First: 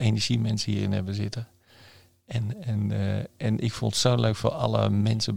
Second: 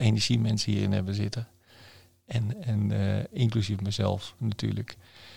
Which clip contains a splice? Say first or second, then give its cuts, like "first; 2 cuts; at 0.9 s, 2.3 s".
second; 1 cut; at 3.3 s